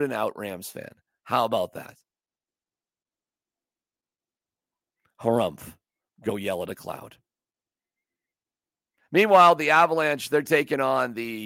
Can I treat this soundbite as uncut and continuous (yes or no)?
yes